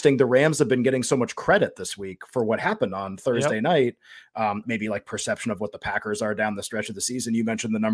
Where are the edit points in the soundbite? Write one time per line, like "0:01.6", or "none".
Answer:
0:04.6